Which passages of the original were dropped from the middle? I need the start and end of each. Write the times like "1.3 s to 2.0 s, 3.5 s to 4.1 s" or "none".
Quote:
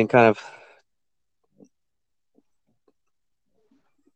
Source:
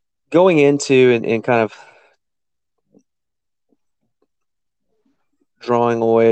none